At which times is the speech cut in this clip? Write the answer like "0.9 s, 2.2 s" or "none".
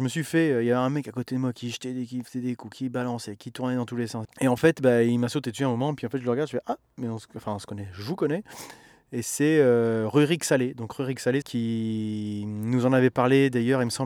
4.2 s, 11.4 s